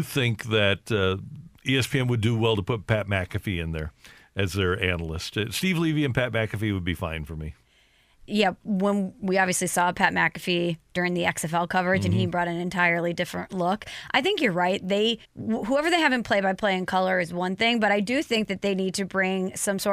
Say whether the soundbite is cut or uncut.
cut